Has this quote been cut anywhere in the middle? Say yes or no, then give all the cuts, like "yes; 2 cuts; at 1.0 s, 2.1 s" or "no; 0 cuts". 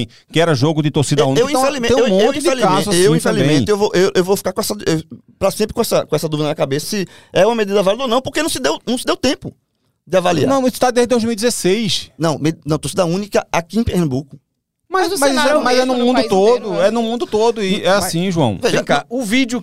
yes; 1 cut; at 6.8 s